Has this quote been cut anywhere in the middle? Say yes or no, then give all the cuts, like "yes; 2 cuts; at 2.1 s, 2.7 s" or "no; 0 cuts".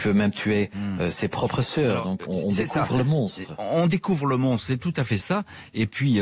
yes; 1 cut; at 2.3 s